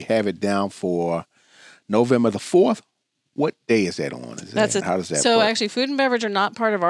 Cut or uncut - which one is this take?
cut